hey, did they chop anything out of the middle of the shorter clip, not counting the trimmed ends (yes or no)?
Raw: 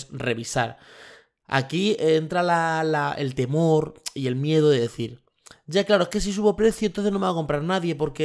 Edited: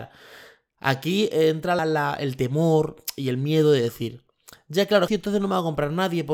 yes